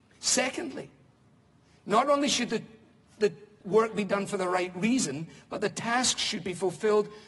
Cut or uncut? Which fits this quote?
uncut